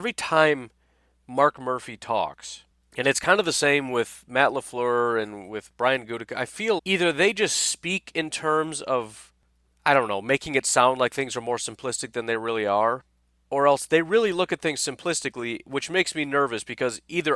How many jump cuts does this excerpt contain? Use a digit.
1